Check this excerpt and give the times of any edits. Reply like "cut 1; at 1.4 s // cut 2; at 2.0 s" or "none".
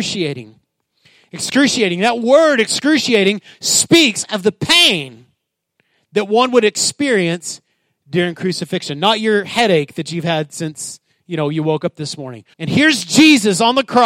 cut 1; at 12.5 s